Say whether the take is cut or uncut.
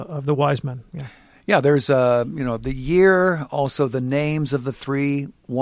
uncut